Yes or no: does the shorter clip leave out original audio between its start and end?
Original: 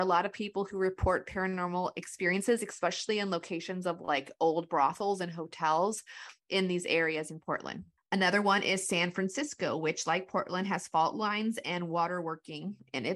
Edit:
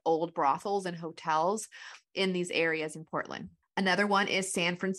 no